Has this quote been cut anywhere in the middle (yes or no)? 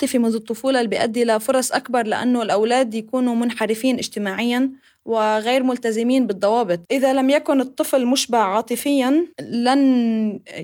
yes